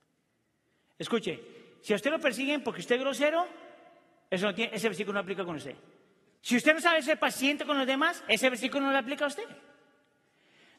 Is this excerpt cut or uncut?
cut